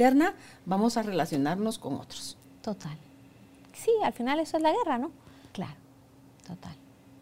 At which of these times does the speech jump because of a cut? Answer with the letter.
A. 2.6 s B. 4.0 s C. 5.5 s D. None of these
C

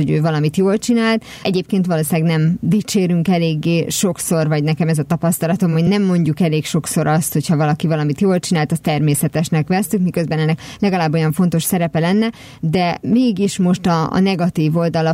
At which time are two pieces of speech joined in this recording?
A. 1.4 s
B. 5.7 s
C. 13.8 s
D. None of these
D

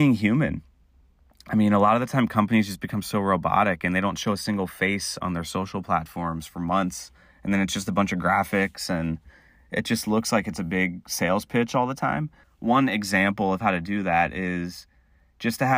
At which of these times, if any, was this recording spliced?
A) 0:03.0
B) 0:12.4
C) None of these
B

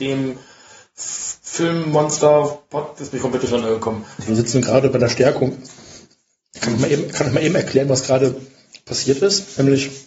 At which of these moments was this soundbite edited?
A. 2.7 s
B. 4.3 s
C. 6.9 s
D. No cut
B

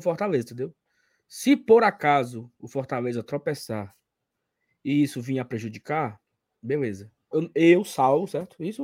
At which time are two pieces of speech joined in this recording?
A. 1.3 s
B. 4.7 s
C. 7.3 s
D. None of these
C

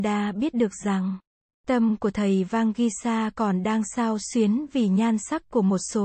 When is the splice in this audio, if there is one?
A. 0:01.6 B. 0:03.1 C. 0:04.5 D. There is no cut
D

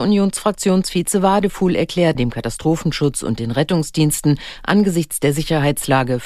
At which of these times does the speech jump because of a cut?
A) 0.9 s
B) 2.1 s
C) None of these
B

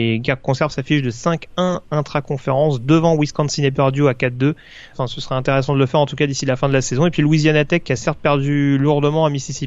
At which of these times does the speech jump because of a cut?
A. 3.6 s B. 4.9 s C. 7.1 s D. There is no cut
B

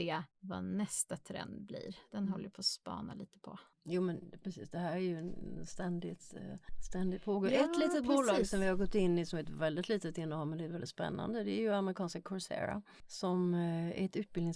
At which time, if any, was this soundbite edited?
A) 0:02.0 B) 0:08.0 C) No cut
C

